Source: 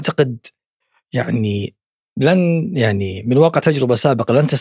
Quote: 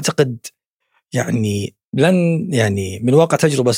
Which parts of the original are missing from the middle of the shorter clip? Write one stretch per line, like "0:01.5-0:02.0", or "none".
0:01.9-0:02.1